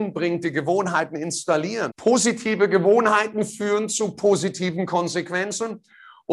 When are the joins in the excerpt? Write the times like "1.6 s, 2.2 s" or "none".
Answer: 1.9 s